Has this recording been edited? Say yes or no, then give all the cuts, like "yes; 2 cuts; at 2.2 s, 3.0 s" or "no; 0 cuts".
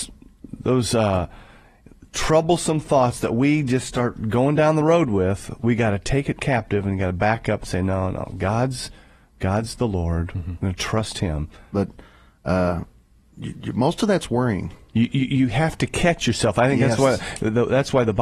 yes; 1 cut; at 11.7 s